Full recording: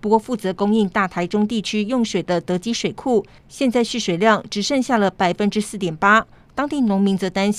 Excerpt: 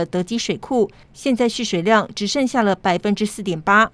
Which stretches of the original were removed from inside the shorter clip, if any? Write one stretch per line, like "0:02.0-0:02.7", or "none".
none